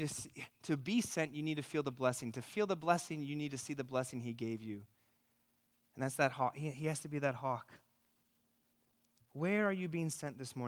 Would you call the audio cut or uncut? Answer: uncut